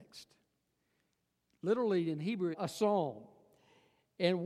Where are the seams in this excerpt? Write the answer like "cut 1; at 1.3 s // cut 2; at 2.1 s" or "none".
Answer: cut 1; at 2.5 s